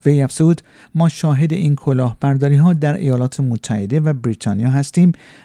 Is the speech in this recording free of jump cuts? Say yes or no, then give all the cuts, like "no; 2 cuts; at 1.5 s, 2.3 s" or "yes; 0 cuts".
yes; 0 cuts